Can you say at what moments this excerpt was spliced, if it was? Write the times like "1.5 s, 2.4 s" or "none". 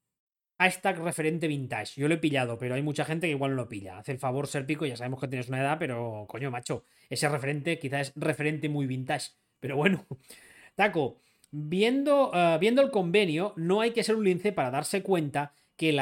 none